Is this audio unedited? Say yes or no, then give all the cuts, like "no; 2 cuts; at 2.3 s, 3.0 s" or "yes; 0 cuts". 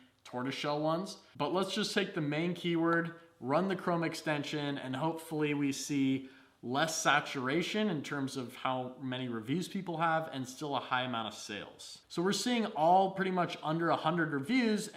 no; 1 cut; at 12.0 s